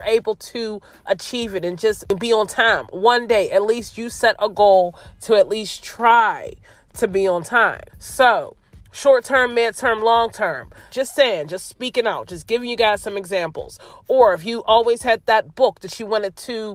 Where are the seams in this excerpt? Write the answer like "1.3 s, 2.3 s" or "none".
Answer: 7.9 s, 10.9 s